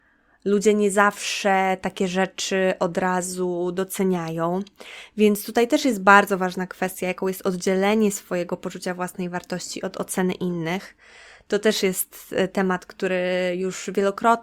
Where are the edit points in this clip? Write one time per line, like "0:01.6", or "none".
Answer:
none

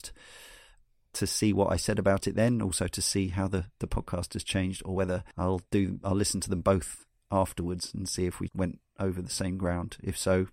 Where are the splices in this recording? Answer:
0:05.3
0:08.5

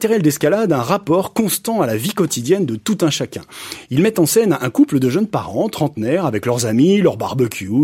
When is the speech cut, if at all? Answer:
none

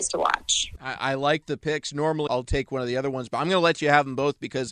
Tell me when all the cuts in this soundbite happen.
0:02.3

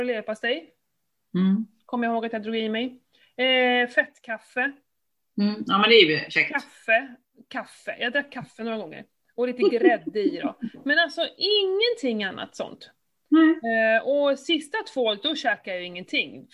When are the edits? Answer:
none

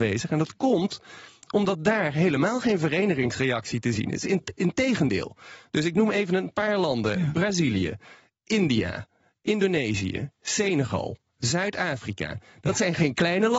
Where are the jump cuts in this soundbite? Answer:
none

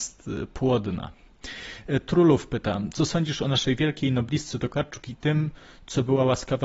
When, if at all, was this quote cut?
none

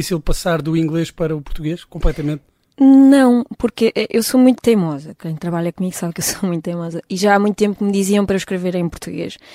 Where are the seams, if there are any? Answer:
none

